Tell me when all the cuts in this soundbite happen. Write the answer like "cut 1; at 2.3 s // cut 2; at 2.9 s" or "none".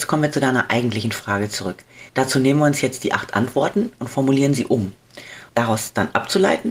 cut 1; at 2.1 s // cut 2; at 5.5 s